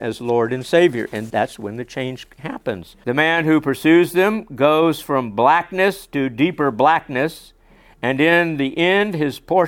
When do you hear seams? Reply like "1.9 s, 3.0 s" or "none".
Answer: 1.3 s, 3.0 s